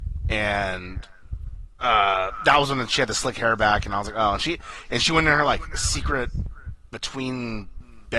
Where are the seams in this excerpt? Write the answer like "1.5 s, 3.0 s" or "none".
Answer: none